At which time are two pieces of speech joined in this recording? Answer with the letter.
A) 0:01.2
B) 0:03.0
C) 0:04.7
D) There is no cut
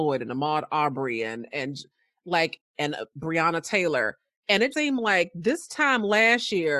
C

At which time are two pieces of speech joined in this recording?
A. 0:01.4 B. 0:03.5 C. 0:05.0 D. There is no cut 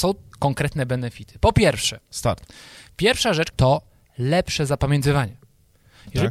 B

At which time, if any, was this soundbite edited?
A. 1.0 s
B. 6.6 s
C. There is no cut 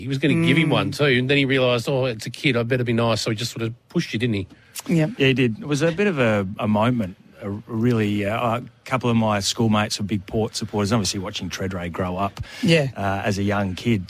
C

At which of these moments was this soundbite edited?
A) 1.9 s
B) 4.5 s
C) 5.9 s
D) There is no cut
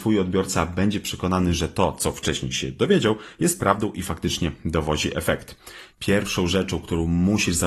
C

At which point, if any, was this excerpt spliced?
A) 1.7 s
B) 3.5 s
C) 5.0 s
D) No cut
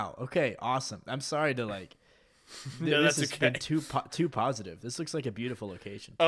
D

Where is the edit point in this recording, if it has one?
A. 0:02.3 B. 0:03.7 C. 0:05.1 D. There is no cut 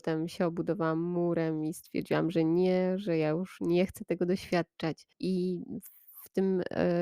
C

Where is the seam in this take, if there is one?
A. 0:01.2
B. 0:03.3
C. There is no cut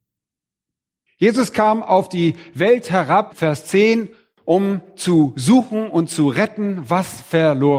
B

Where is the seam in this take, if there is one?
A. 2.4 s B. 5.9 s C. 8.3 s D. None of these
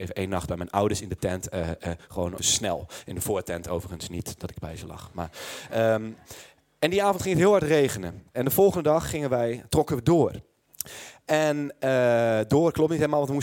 A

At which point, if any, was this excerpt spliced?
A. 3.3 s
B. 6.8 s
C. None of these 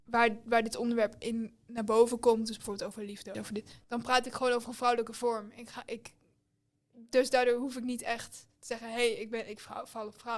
A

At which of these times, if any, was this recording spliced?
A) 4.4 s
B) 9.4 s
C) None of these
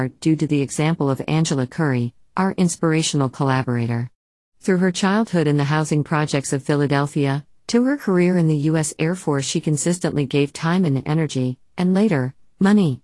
C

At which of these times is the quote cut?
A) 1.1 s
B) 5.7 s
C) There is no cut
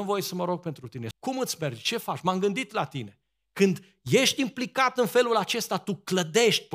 A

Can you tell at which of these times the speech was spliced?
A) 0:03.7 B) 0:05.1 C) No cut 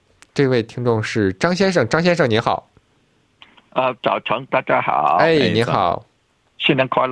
C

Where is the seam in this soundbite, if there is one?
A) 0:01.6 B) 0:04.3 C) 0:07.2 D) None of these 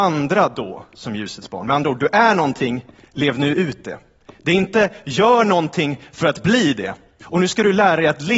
C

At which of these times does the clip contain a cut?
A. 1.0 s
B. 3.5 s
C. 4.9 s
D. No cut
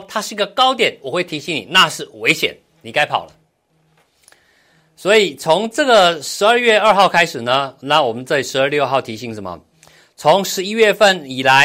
D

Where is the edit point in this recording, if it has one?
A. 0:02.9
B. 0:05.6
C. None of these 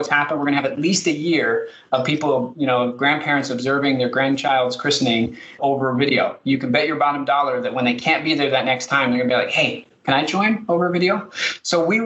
B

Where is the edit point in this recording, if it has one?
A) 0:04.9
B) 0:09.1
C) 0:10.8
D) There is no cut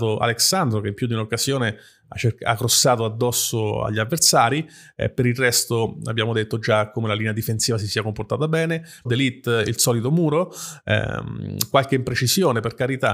B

